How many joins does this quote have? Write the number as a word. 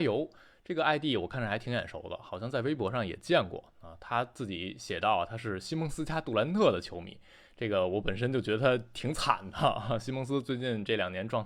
zero